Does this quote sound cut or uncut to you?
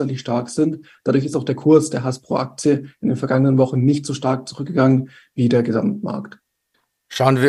uncut